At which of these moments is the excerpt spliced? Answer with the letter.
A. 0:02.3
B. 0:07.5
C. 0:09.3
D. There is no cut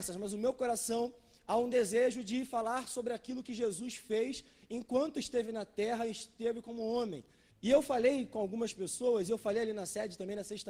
B